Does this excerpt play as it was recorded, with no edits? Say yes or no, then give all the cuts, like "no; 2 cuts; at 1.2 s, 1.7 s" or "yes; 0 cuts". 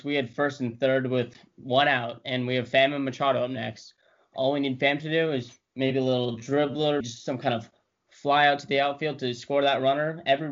no; 1 cut; at 7.0 s